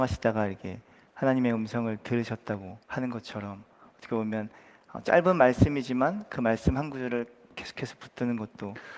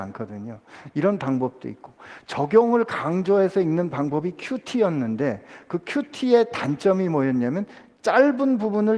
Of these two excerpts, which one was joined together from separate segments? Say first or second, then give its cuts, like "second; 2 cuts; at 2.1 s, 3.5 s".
first; 1 cut; at 2.8 s